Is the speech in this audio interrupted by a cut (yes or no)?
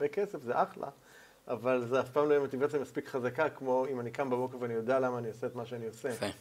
no